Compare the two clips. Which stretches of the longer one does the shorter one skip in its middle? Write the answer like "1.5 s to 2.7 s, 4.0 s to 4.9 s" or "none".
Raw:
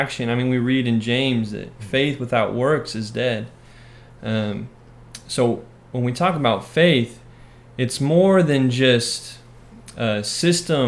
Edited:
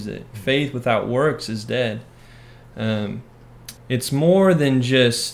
5.2 s to 7.7 s